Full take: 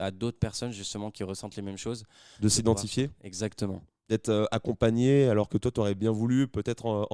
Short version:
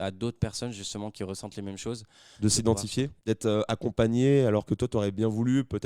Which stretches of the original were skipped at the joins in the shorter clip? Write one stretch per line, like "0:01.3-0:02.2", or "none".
0:03.2-0:04.0